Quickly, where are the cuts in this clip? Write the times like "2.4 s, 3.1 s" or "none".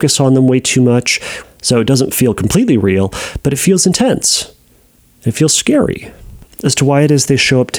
1.4 s